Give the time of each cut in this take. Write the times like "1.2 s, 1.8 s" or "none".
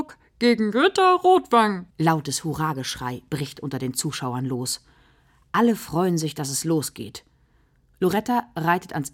1.9 s

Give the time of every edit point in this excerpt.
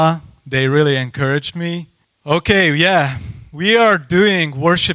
2.0 s

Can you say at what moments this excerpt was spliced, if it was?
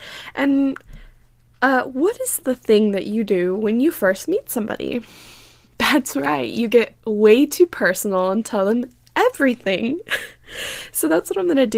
none

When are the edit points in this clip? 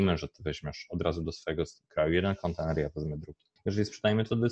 3.6 s

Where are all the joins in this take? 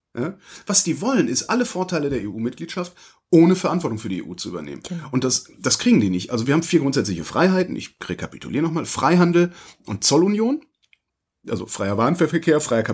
none

